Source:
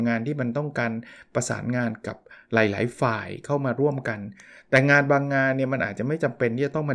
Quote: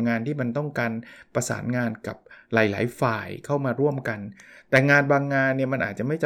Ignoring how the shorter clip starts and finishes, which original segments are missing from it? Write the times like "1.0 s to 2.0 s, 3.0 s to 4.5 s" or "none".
none